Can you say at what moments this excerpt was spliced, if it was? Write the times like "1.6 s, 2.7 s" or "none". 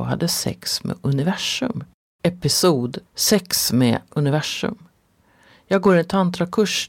3.1 s